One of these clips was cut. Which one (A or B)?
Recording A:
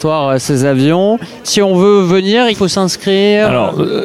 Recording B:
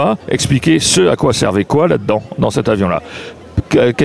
A